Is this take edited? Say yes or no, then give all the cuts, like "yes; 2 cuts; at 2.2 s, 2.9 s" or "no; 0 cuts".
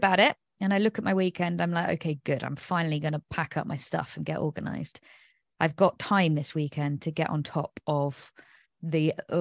no; 0 cuts